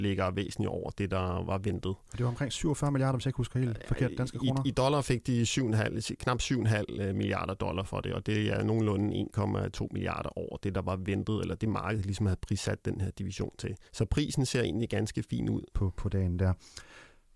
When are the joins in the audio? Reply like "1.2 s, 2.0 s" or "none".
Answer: 13.9 s, 15.7 s